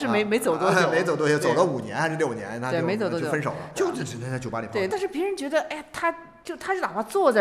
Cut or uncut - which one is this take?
cut